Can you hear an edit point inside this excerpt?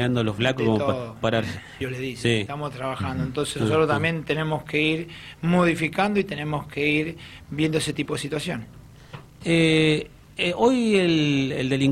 yes; 1 cut; at 1.8 s

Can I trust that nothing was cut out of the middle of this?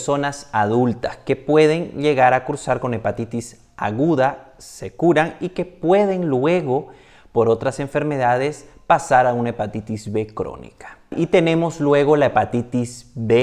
yes; 0 cuts

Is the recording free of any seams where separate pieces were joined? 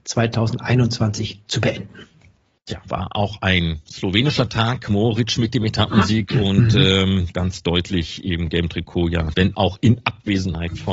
no; 2 cuts; at 7.3 s, 9.3 s

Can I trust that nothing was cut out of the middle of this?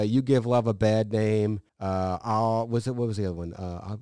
no; 1 cut; at 1.7 s

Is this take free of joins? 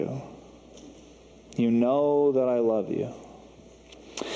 yes; 0 cuts

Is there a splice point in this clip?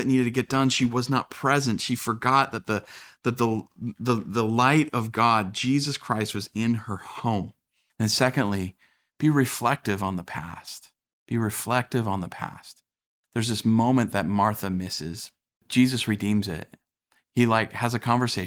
no; 0 cuts

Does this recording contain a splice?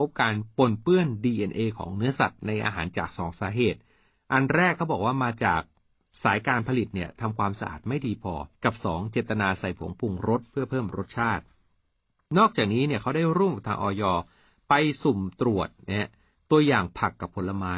yes; 2 cuts; at 2.9 s, 8.5 s

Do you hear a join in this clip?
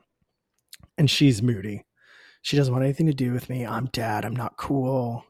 no; 0 cuts

